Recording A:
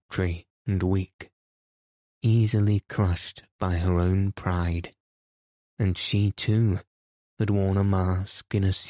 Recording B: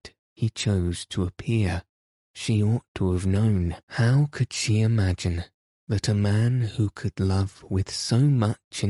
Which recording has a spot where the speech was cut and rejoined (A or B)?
B